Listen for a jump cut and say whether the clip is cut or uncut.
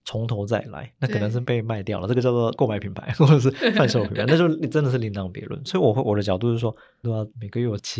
cut